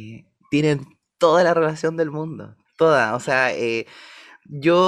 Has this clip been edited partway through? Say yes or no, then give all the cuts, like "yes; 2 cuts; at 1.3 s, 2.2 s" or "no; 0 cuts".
yes; 1 cut; at 2.6 s